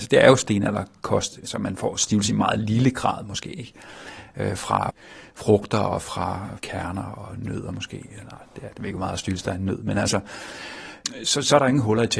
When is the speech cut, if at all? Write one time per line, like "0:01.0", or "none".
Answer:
0:06.6